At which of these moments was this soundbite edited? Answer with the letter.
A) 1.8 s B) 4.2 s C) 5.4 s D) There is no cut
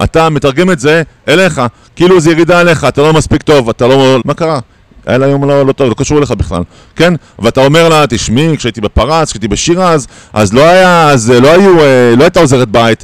B